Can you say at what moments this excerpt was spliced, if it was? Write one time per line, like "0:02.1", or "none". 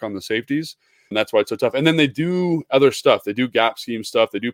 0:01.1